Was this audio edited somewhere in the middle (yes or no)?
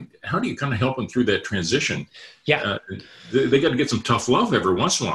no